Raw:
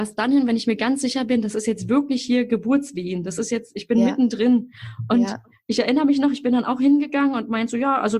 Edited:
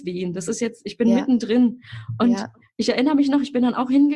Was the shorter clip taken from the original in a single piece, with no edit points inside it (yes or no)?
yes